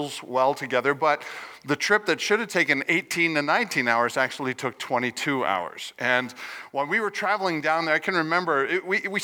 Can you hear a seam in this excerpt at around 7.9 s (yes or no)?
no